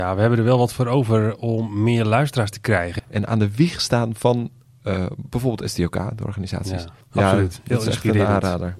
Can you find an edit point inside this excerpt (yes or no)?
yes